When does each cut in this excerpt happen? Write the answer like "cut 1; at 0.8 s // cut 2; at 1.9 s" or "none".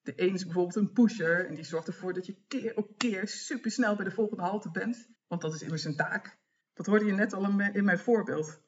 cut 1; at 5.2 s // cut 2; at 6.6 s